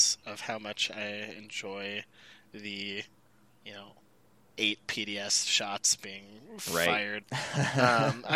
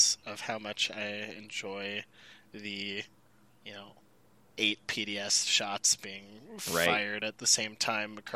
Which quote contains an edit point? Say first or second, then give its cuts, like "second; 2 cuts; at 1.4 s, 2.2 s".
first; 1 cut; at 7.2 s